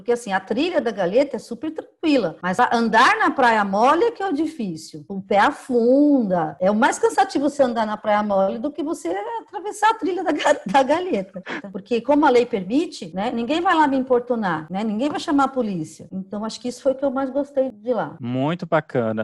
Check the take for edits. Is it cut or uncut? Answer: cut